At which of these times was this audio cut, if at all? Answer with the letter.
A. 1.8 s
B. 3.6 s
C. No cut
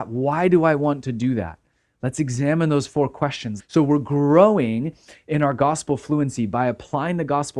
B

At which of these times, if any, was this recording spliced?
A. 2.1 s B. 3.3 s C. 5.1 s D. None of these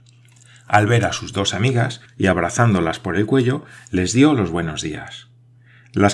A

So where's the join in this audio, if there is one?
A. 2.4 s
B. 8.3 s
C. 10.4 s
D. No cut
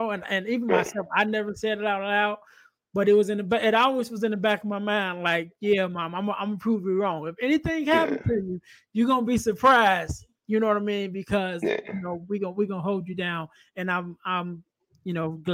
D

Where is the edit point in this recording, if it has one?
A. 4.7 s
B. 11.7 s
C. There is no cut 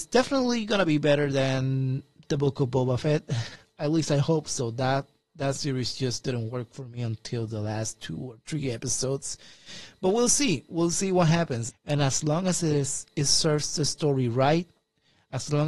B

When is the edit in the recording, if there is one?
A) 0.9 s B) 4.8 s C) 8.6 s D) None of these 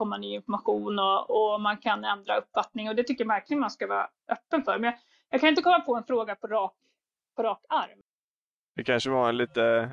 D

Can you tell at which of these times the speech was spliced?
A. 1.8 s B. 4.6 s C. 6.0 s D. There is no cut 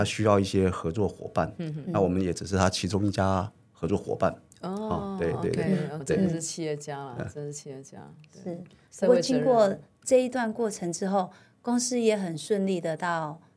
C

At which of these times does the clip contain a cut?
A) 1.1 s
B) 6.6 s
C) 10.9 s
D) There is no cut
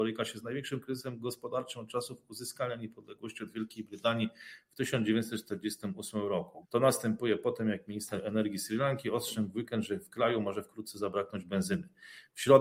B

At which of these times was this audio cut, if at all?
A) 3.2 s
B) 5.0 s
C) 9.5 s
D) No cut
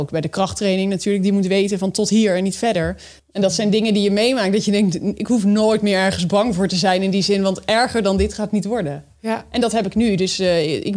A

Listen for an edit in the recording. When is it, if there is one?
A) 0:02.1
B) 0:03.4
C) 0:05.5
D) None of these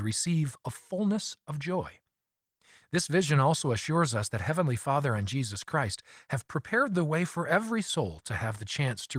D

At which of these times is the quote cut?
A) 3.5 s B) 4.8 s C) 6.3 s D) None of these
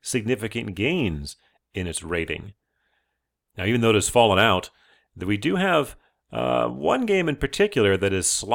A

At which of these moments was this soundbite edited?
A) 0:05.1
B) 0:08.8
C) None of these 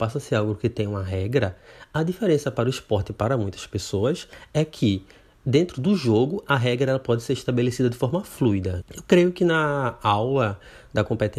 B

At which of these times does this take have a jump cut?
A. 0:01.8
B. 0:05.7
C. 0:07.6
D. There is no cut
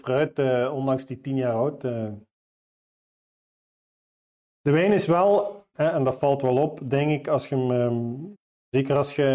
B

